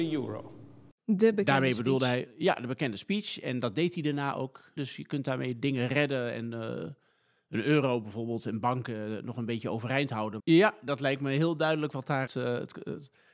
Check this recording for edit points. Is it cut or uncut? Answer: cut